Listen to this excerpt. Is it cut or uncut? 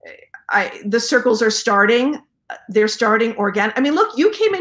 uncut